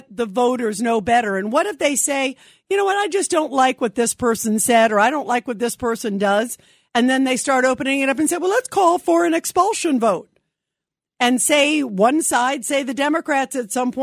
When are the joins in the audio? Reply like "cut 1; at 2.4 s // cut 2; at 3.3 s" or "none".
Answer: none